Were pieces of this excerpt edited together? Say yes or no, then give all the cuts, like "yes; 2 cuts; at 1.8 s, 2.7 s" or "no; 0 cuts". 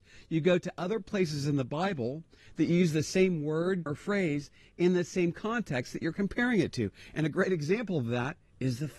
yes; 1 cut; at 3.9 s